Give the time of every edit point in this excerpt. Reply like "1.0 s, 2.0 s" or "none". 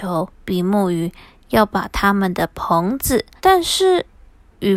3.4 s